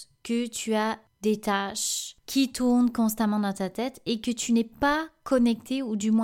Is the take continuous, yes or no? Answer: yes